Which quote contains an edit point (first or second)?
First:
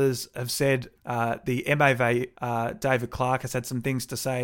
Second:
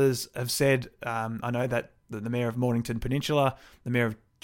first